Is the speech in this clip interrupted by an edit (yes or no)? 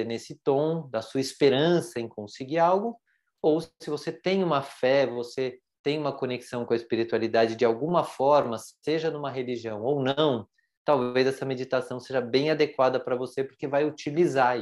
no